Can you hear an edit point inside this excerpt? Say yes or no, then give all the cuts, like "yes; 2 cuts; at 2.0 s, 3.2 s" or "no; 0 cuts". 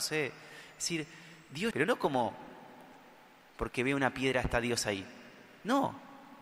yes; 1 cut; at 1.7 s